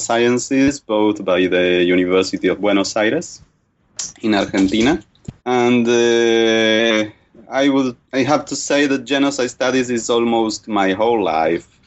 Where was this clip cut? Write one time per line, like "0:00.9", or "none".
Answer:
0:05.4
0:08.0